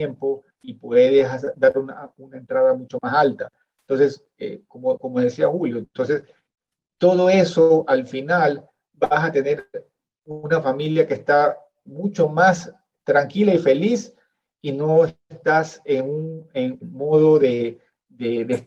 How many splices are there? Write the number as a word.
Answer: two